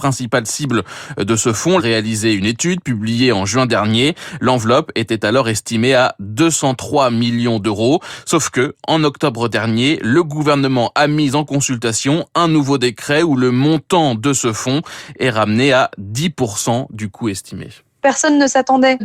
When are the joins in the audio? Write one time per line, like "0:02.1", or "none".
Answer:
0:01.8